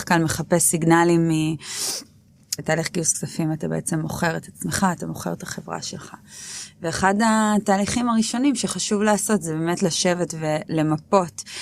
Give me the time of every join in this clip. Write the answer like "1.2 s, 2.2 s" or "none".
2.6 s